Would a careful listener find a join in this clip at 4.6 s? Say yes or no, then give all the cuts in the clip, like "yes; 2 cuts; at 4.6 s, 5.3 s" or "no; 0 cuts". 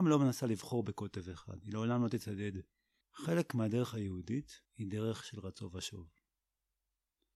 yes; 2 cuts; at 3.0 s, 4.6 s